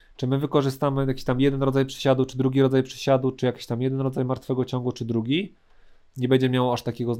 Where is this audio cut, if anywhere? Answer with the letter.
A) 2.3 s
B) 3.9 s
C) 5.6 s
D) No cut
D